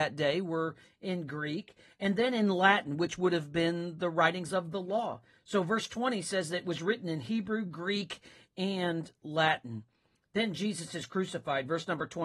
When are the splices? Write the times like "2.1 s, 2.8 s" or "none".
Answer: none